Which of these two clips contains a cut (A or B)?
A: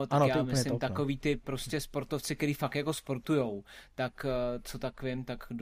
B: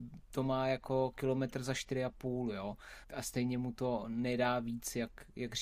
B